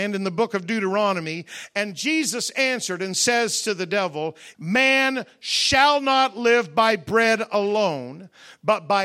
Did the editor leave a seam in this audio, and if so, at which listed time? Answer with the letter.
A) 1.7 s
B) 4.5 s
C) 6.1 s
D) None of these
B